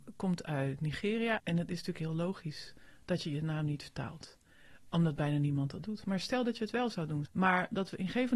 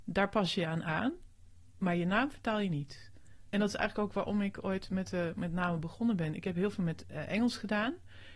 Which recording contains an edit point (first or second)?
first